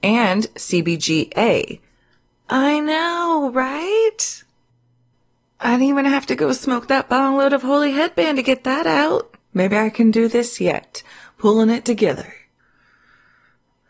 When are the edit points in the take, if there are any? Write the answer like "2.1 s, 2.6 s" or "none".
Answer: 9.4 s